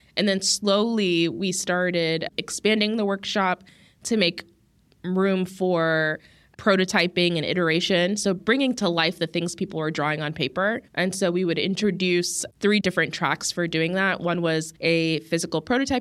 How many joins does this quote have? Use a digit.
3